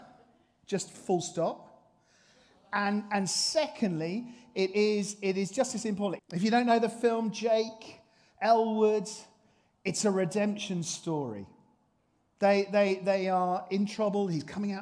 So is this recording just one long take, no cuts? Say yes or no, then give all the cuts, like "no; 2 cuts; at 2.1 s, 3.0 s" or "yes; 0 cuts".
no; 1 cut; at 6.2 s